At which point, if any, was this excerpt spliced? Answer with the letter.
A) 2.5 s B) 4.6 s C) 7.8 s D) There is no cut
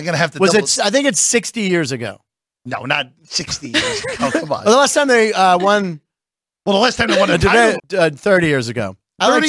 C